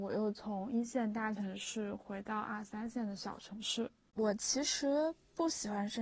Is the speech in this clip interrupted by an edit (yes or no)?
no